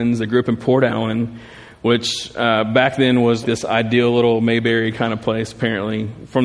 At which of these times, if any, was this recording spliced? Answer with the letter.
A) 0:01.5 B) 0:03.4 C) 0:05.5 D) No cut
B